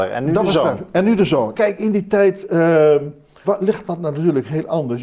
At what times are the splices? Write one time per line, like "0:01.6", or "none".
0:01.5
0:03.4

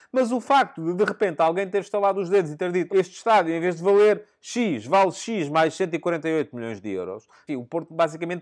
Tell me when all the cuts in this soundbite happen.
0:02.9
0:07.5

